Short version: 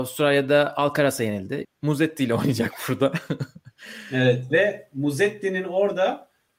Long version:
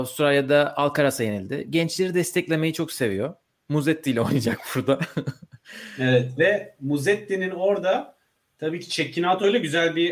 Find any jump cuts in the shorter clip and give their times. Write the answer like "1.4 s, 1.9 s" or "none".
1.6 s